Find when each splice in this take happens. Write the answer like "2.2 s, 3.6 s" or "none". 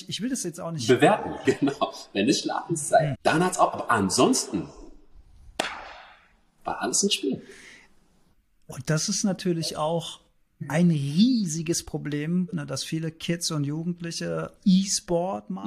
1.4 s, 3.1 s, 12.5 s